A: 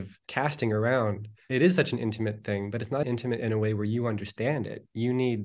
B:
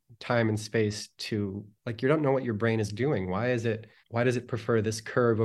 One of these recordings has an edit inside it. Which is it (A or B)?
A